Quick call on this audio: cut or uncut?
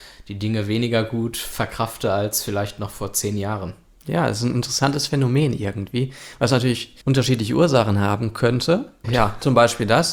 cut